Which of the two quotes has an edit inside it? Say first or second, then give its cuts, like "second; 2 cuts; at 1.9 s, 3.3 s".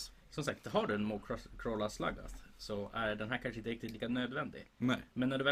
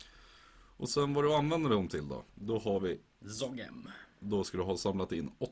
second; 1 cut; at 2.3 s